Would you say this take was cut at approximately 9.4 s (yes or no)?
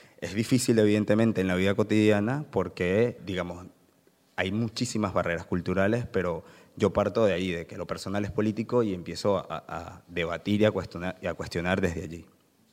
no